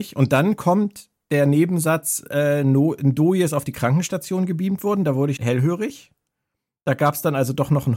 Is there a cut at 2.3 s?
no; 1 cut; at 5.4 s

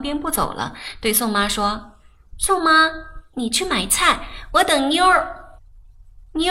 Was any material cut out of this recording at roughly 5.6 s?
yes; 1 cut; at 5.6 s

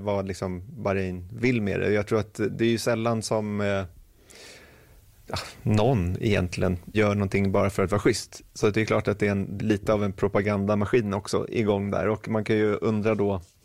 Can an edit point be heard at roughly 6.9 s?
yes; 2 cuts; at 6.9 s, 9.6 s

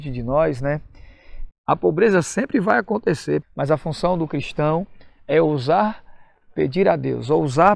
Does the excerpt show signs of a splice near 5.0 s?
no; 2 cuts; at 1.5 s, 3.4 s

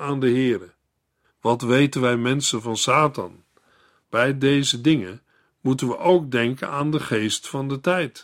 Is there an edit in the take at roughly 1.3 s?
yes; 2 cuts; at 1.3 s, 4.0 s

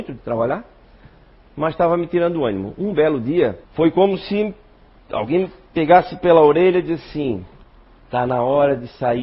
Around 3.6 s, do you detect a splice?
yes; 1 cut; at 3.6 s

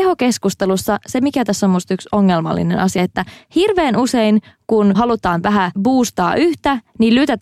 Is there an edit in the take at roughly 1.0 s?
no; 1 cut; at 3.0 s

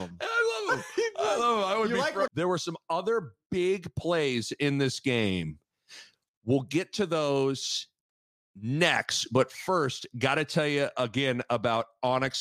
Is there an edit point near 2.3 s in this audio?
yes; 1 cut; at 2.3 s

